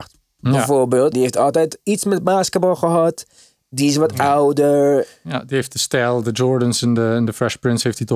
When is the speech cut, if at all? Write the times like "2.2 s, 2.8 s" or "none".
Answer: 1.1 s